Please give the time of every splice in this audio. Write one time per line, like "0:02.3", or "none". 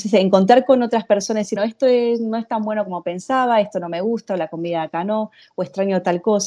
0:01.6